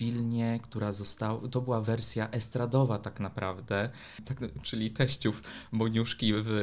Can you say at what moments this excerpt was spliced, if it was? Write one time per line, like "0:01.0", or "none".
0:04.6